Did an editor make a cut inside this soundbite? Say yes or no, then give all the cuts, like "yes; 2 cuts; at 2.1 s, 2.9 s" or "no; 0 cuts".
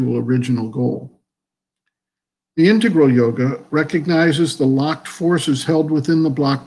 no; 0 cuts